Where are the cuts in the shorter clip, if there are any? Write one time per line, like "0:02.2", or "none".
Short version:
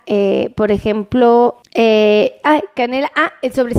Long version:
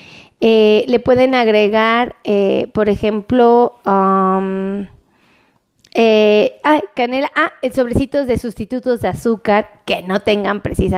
0:01.6